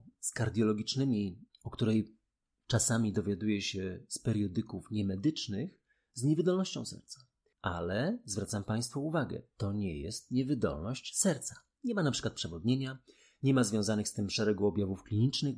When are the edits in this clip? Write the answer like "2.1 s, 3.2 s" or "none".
1.5 s